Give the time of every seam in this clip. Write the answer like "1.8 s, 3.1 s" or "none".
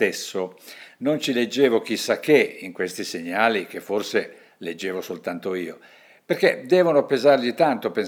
none